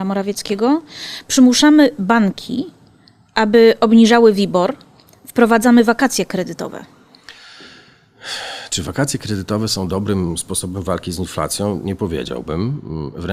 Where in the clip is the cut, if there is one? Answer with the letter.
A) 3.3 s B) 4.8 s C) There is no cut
C